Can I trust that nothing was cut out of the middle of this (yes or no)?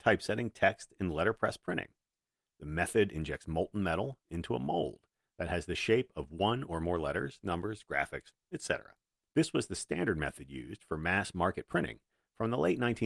no